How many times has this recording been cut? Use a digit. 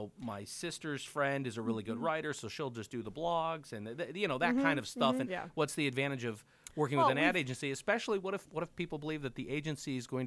1